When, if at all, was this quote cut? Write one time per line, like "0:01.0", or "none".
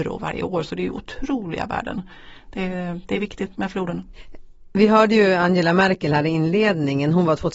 0:03.5